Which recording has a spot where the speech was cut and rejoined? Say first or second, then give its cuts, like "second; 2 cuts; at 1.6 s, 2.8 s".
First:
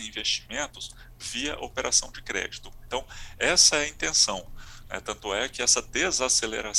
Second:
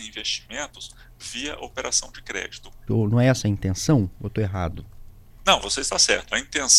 second; 1 cut; at 2.9 s